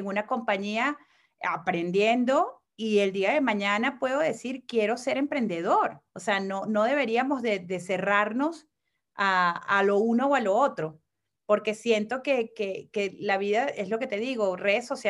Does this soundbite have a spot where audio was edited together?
yes; 1 cut; at 6.1 s

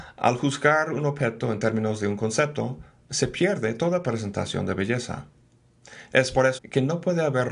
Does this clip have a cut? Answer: yes; 1 cut; at 6.6 s

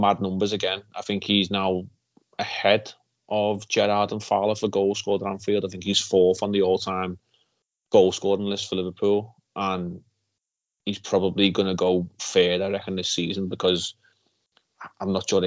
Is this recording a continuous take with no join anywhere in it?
yes; 0 cuts

